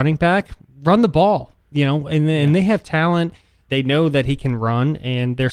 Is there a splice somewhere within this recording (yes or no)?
yes